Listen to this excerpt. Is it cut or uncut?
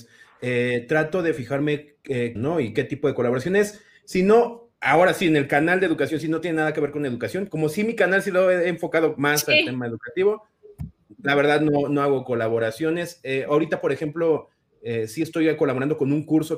cut